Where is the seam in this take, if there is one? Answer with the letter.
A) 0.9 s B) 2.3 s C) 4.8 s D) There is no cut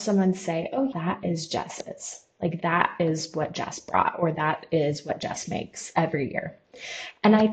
A